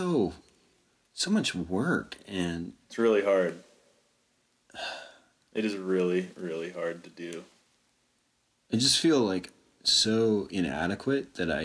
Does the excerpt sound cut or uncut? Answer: uncut